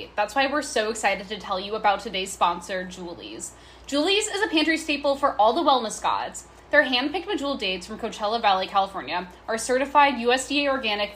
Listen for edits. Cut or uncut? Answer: uncut